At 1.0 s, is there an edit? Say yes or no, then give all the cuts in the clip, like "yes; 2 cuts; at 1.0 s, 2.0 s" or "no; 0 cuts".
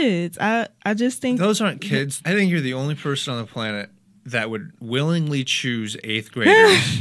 no; 1 cut; at 2.2 s